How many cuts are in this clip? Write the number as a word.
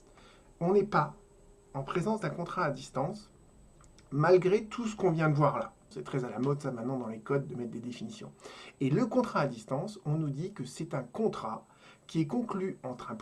one